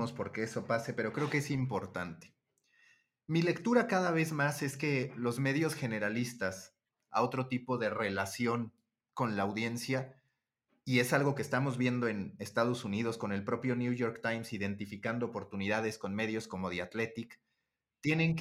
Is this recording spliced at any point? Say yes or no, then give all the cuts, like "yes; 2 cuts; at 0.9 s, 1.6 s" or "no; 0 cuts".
yes; 1 cut; at 7.1 s